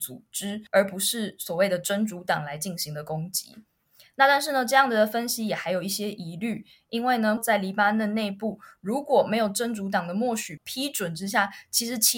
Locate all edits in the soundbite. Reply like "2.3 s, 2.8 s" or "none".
7.4 s, 10.6 s